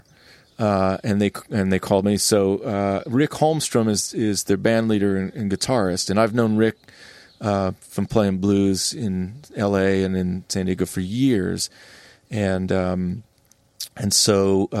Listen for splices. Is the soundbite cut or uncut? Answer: uncut